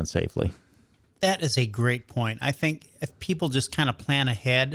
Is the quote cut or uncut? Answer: uncut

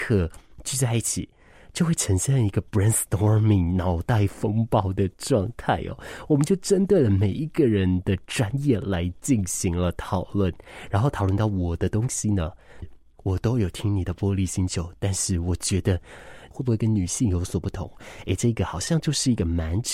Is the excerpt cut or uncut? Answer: cut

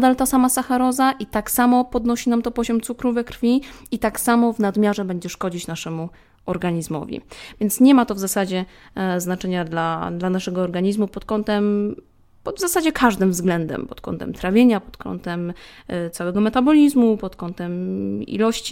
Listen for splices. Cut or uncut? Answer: uncut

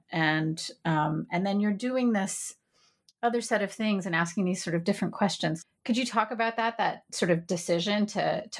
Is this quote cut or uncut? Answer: uncut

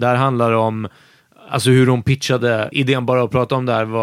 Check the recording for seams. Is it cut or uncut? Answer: cut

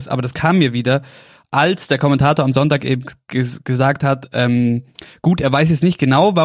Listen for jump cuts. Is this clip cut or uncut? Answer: uncut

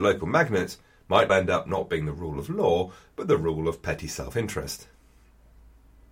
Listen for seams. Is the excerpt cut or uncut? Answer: cut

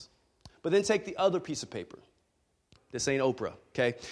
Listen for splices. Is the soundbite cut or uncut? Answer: cut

